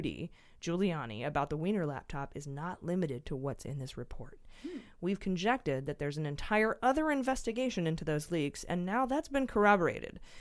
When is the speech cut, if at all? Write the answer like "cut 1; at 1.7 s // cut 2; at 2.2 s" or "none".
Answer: none